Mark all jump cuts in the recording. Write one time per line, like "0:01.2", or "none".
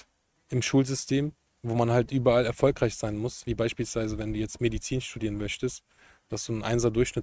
none